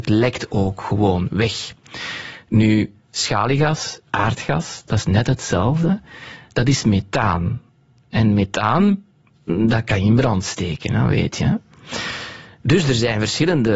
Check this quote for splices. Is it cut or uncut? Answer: uncut